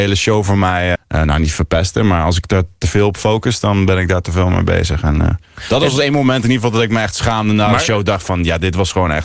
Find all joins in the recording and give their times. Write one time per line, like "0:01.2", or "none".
0:01.0